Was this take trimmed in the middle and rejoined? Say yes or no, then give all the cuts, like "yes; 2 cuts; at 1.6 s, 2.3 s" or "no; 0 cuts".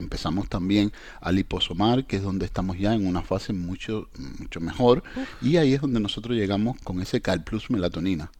yes; 1 cut; at 6.8 s